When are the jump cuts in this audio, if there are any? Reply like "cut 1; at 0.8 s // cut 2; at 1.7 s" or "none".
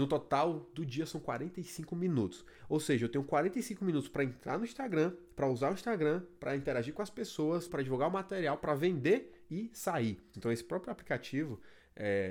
cut 1; at 7.7 s // cut 2; at 10.3 s